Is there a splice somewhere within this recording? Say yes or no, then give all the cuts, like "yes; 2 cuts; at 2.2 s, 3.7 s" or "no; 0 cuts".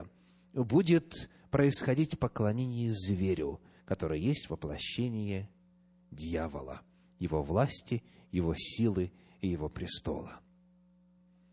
no; 0 cuts